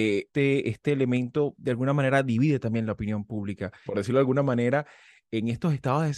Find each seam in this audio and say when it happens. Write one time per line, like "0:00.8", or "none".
0:03.9